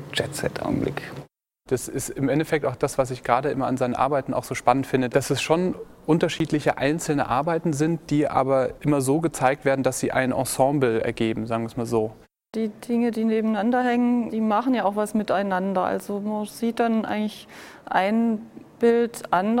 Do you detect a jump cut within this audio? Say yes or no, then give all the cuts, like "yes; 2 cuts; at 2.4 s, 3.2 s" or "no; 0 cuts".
no; 0 cuts